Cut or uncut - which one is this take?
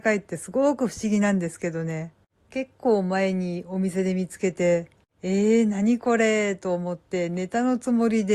uncut